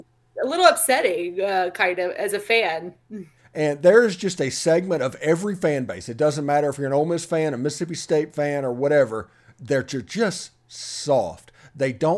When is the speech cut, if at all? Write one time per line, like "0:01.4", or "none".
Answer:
0:03.4